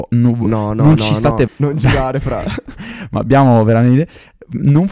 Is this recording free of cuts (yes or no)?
no